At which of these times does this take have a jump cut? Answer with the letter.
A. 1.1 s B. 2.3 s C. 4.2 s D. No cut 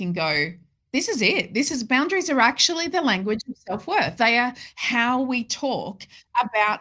D